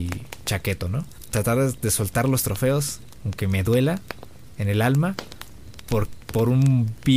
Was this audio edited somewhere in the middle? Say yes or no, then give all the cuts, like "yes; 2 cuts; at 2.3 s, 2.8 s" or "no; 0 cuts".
yes; 1 cut; at 1.3 s